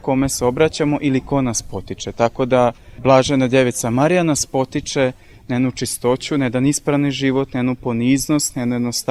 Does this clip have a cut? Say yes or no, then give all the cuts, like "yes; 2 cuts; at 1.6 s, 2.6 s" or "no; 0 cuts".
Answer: no; 0 cuts